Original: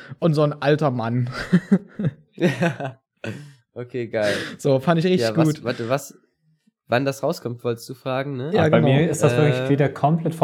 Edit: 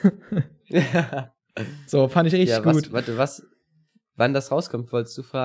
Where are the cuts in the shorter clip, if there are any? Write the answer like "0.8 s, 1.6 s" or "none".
1.9 s